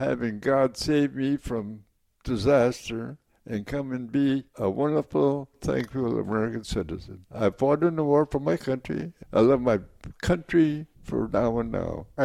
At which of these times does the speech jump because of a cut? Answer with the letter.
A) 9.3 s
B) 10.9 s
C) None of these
B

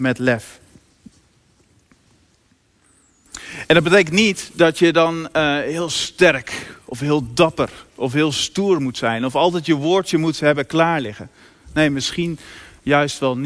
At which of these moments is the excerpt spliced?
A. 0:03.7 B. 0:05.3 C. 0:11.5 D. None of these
D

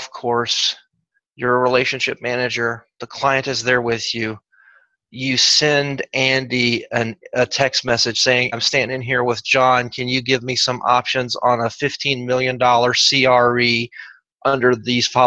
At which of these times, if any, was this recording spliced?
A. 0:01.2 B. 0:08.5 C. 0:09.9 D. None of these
B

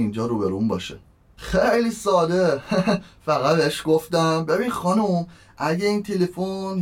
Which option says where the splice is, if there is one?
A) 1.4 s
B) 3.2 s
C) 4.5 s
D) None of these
A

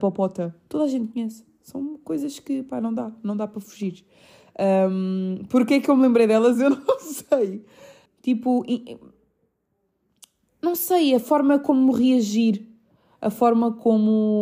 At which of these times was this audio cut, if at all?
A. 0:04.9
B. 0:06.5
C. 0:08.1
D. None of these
C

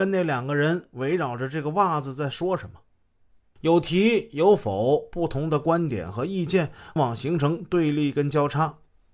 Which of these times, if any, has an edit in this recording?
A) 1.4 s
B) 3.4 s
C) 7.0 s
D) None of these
C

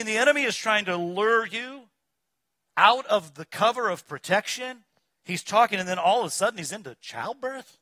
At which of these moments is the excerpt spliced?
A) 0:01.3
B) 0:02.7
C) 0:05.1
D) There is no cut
D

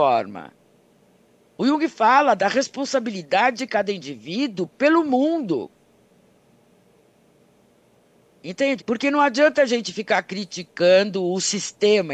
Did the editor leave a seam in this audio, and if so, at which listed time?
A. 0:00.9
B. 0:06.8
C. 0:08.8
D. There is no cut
C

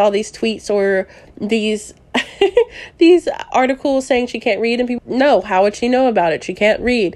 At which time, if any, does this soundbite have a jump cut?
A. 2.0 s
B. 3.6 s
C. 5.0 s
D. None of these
C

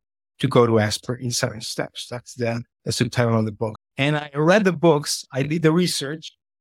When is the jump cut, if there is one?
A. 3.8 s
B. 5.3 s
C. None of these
A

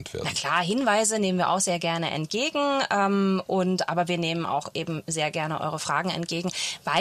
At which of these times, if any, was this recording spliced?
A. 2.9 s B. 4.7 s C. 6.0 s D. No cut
D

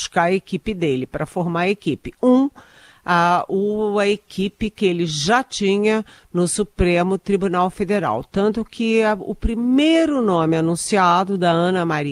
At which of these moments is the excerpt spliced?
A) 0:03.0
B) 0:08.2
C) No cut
C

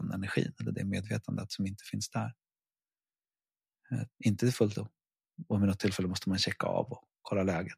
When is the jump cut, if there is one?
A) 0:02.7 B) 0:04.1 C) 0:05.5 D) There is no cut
B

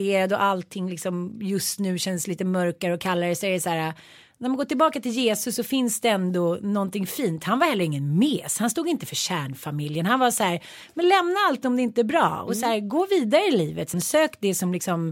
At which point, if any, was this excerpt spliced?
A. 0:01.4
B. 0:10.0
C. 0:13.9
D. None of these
C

